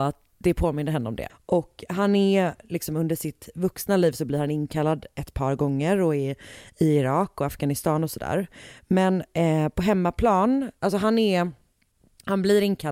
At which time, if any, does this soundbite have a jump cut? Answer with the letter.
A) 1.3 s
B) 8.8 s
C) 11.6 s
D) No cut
A